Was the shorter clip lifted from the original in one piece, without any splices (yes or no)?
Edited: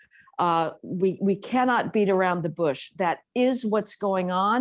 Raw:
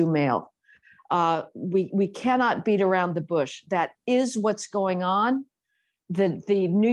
yes